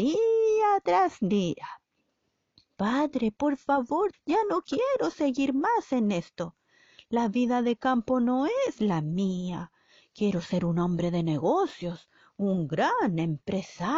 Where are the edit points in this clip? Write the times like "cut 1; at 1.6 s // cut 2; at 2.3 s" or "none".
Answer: cut 1; at 4.1 s